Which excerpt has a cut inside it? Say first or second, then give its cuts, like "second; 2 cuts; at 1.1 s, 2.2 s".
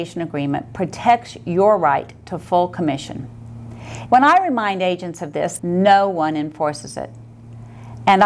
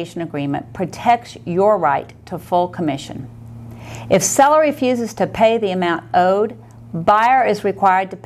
first; 2 cuts; at 4.1 s, 5.6 s